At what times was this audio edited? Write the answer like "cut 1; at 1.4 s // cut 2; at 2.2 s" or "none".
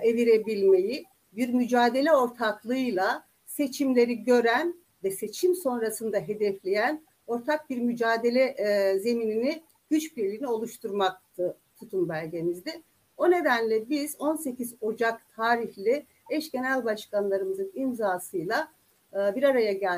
none